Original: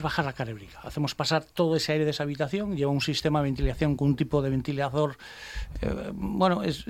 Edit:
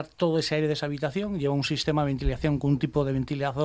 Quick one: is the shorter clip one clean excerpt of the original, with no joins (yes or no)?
yes